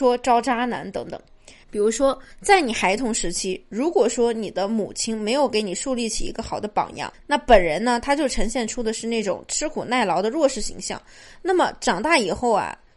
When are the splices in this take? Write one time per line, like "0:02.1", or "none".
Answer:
0:01.6